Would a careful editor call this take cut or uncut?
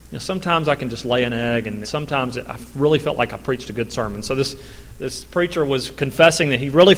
cut